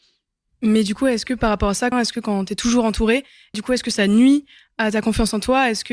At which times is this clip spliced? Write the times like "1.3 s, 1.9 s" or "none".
1.9 s, 3.5 s